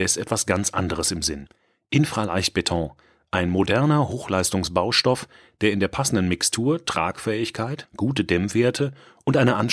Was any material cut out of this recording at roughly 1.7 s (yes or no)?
no